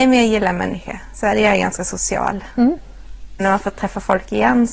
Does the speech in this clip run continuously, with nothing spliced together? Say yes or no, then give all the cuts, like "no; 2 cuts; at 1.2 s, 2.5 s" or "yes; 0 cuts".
no; 1 cut; at 3.4 s